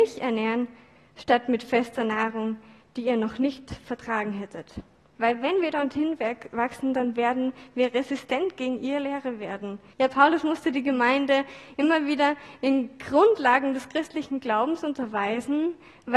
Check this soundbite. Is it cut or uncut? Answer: cut